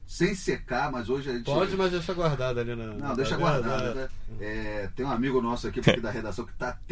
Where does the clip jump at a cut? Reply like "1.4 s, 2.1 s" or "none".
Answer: 3.9 s, 5.8 s